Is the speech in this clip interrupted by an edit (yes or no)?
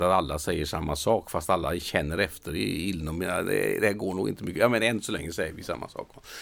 no